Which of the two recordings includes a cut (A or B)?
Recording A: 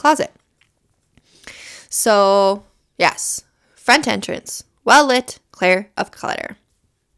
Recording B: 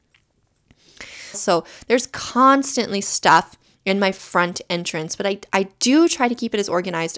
B